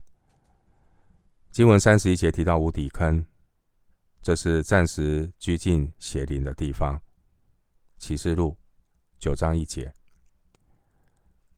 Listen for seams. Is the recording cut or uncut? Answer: uncut